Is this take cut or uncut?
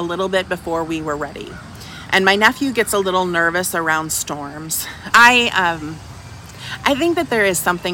cut